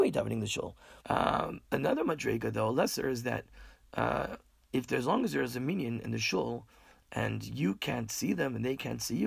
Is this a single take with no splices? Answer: no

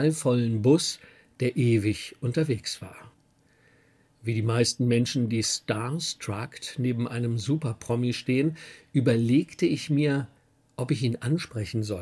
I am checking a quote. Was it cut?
no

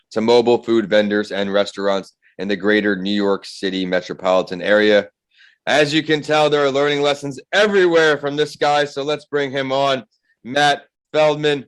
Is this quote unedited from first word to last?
yes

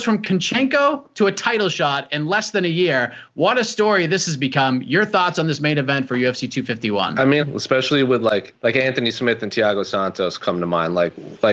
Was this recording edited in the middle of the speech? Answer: yes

